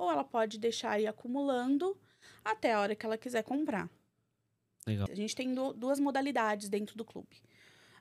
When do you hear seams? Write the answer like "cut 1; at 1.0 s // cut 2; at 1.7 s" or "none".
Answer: cut 1; at 5.1 s